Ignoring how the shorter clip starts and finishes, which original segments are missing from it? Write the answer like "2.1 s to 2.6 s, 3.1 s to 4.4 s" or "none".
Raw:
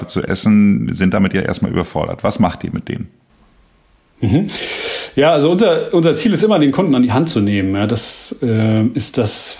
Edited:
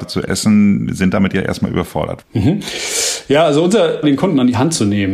2.2 s to 4.1 s, 5.9 s to 6.6 s